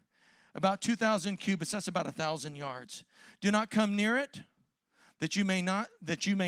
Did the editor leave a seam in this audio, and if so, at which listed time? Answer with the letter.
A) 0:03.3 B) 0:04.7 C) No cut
C